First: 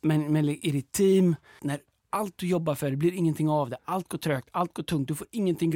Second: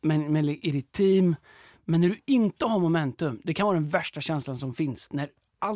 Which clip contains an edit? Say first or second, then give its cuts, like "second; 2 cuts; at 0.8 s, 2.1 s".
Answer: first; 1 cut; at 1.6 s